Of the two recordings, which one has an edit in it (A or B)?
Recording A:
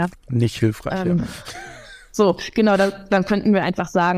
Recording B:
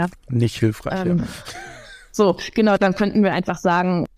B